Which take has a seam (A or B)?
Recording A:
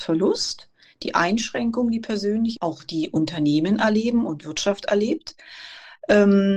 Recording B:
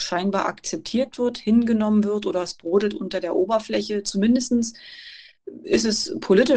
A